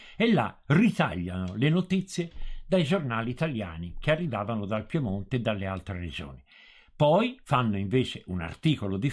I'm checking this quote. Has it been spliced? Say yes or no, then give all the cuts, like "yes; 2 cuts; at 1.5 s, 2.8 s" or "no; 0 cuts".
no; 0 cuts